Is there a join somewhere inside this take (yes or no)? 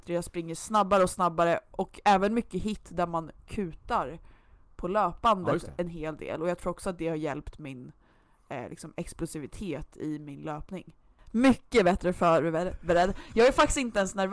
yes